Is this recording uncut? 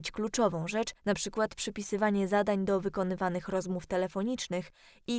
no; 1 cut; at 1.0 s

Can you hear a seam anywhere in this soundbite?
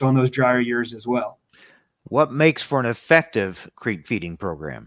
no; 0 cuts

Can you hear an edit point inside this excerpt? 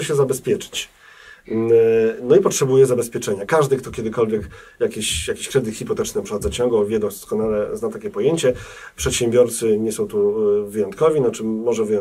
no; 0 cuts

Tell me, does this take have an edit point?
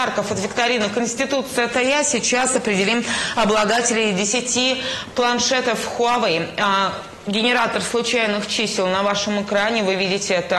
no; 0 cuts

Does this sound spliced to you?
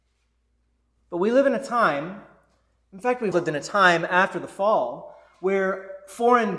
yes; 1 cut; at 3.3 s

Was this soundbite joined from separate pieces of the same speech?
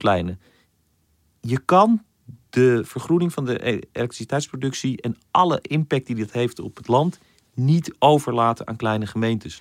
no; 0 cuts

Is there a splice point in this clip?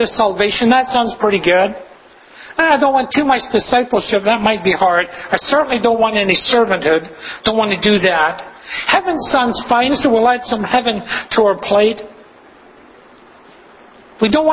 no; 0 cuts

